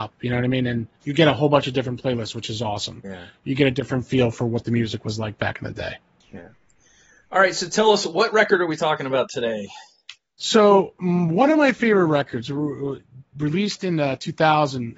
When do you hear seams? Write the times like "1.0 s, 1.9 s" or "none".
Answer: 1.0 s, 3.0 s